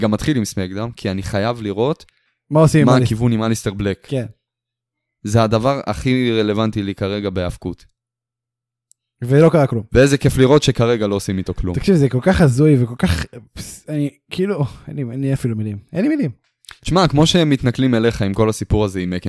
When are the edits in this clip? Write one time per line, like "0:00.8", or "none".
none